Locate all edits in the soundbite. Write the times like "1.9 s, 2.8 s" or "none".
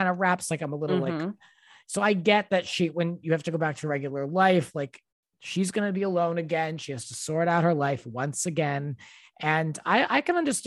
none